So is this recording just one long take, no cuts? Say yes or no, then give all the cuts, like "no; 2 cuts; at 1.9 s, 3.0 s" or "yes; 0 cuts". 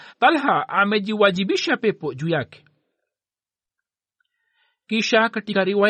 yes; 0 cuts